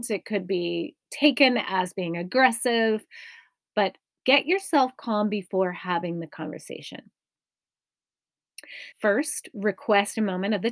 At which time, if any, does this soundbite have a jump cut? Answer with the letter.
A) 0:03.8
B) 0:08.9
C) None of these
B